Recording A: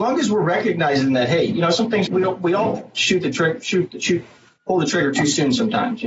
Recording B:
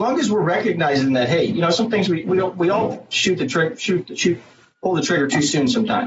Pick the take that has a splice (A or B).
A